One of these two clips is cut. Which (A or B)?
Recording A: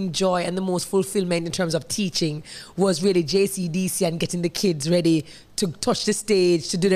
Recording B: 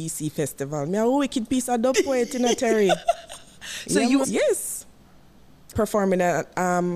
B